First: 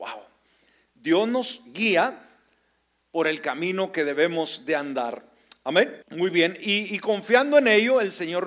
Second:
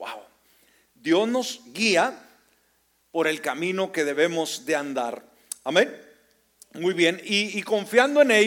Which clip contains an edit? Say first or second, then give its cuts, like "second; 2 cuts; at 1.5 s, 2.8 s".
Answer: first; 1 cut; at 6.0 s